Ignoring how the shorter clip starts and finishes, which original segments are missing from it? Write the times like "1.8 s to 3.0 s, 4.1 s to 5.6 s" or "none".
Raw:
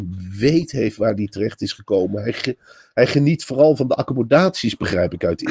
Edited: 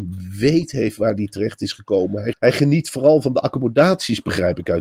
2.3 s to 2.9 s